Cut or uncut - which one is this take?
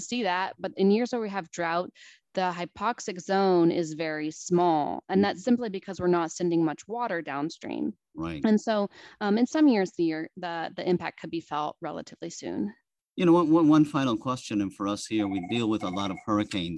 uncut